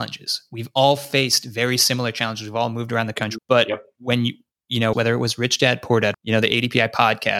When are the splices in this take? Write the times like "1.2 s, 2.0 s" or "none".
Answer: 3.4 s, 4.9 s, 6.1 s